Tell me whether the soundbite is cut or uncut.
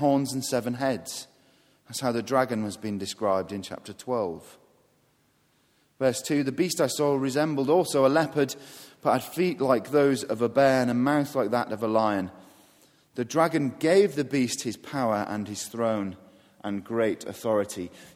uncut